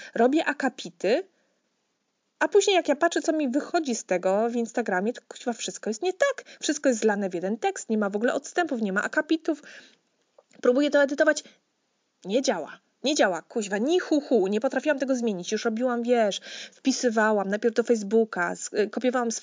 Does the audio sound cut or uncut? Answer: uncut